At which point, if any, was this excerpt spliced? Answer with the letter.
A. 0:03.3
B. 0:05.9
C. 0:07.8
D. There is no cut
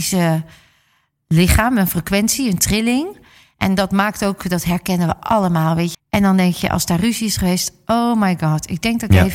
B